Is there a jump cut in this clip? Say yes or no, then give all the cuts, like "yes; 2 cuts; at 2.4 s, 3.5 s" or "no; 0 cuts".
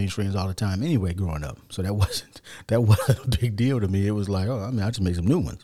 no; 0 cuts